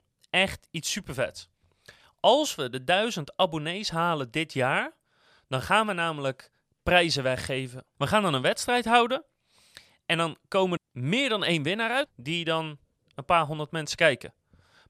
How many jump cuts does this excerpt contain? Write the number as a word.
two